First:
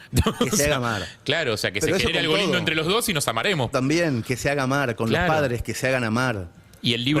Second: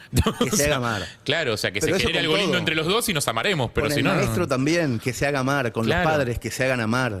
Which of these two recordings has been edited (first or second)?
first